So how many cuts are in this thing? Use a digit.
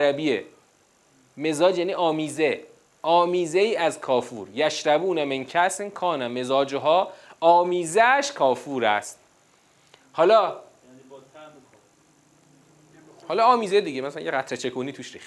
0